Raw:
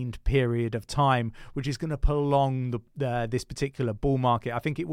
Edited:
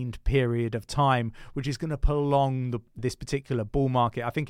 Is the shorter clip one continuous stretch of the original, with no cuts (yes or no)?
no